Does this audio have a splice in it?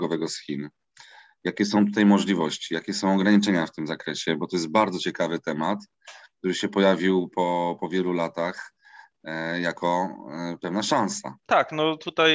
no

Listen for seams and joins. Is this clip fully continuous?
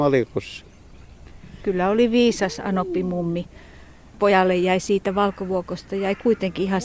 yes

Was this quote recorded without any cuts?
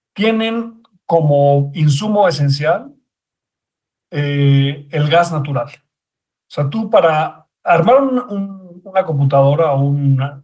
yes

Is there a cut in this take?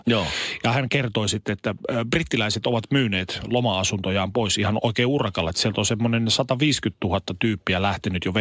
no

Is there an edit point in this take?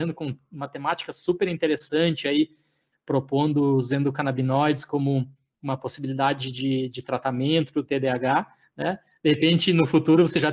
no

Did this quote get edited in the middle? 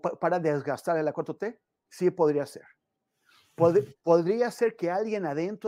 no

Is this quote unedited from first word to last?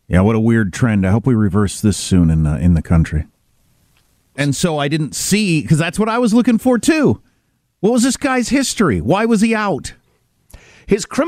no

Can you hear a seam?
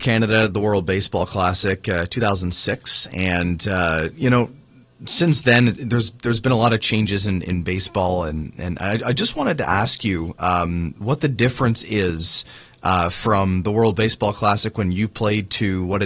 no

